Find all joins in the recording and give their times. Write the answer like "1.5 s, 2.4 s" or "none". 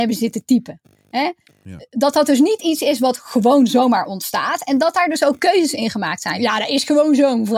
6.4 s